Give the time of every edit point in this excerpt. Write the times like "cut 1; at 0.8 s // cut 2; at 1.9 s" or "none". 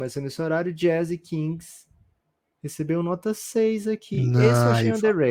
none

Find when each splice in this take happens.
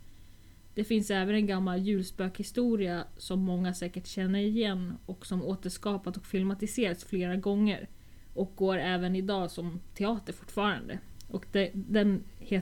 none

